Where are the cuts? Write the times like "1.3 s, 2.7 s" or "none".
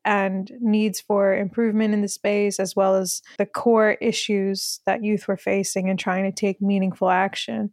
3.4 s

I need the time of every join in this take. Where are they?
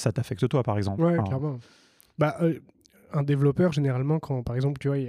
none

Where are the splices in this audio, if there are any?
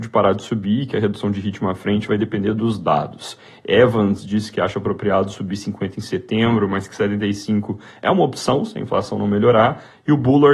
none

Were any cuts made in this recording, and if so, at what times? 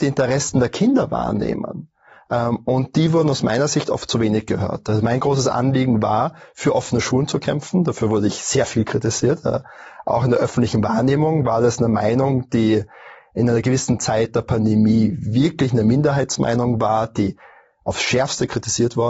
none

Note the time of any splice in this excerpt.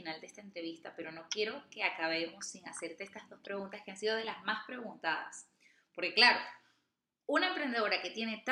none

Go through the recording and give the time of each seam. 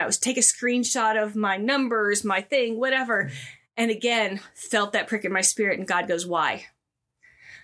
none

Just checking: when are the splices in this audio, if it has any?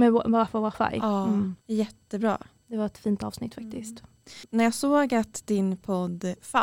1.6 s

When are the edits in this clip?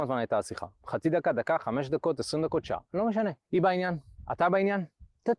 none

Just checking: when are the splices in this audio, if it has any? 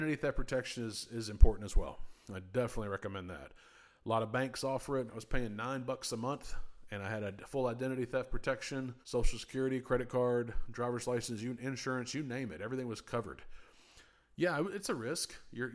5.1 s, 9.0 s

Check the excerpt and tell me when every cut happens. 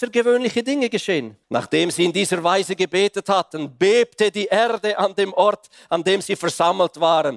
1.4 s

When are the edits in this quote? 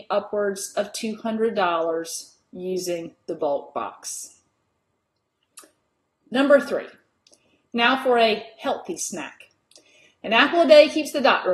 none

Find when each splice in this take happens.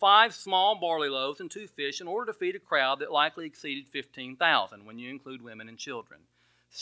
none

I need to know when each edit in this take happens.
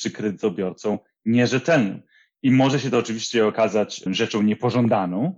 4.1 s

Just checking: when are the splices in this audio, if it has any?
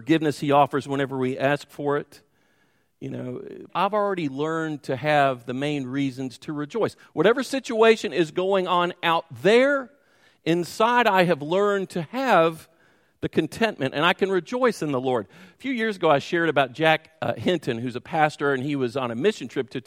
3.7 s, 7.0 s

